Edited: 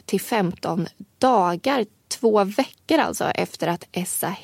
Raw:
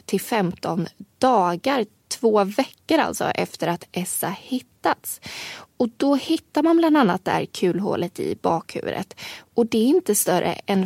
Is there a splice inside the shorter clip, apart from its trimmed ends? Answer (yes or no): no